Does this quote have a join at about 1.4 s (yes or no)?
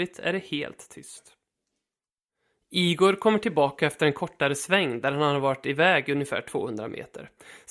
no